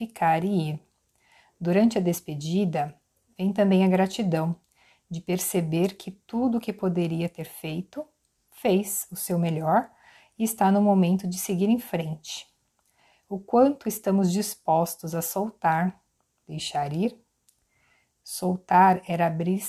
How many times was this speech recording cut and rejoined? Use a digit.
0